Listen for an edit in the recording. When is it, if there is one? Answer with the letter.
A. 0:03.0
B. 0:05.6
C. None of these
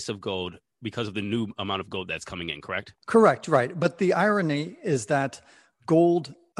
A